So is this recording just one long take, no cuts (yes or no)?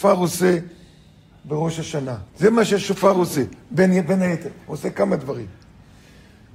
no